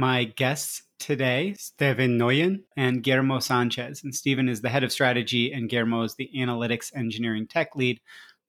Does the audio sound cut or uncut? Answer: uncut